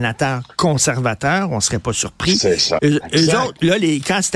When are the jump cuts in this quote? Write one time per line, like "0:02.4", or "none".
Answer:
0:02.8